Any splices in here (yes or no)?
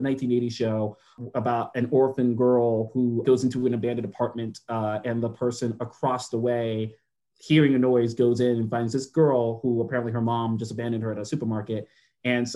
yes